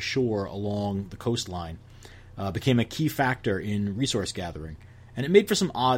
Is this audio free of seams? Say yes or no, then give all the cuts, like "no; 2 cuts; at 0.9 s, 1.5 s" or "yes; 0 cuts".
yes; 0 cuts